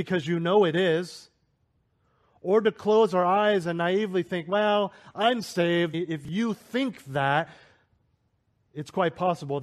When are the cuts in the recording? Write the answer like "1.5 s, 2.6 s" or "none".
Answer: 5.9 s